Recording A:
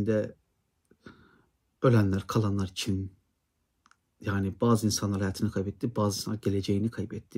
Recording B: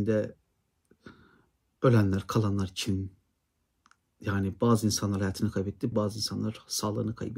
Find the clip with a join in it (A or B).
B